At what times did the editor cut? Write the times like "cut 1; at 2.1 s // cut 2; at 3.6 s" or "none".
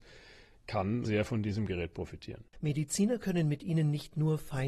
cut 1; at 2.5 s